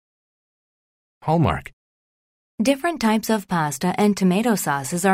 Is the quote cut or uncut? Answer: cut